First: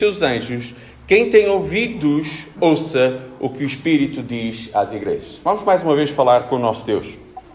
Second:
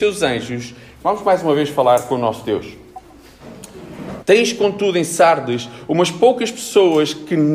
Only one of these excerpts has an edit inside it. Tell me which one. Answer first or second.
second